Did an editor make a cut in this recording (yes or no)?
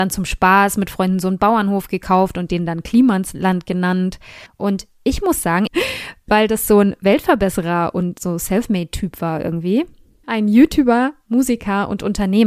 yes